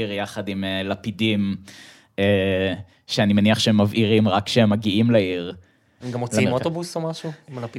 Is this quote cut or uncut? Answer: cut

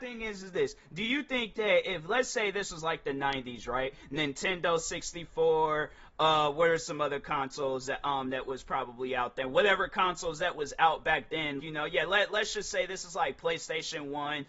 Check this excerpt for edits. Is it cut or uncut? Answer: cut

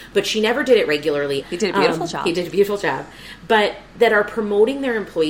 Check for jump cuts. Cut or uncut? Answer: cut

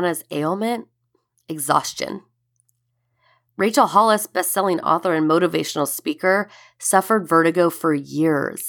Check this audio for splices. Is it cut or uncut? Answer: uncut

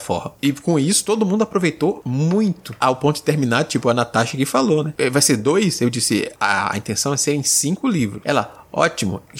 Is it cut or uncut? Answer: uncut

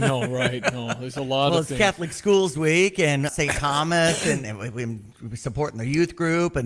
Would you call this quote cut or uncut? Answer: cut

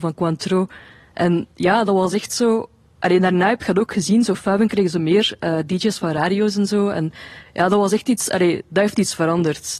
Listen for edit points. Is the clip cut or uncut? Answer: uncut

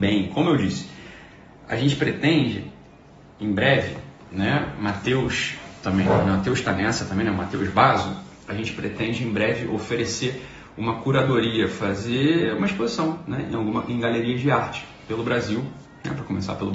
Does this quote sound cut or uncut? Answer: uncut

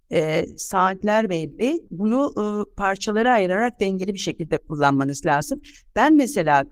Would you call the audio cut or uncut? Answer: uncut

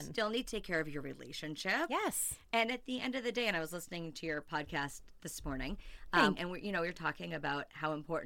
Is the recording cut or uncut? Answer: cut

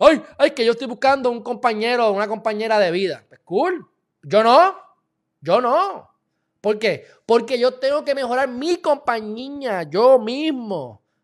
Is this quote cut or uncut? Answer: uncut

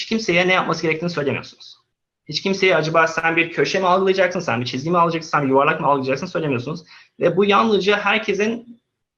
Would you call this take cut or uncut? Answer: uncut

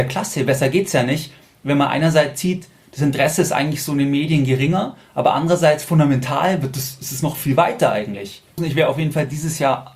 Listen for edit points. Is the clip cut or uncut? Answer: cut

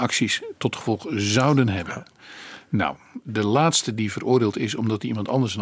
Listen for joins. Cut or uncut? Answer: cut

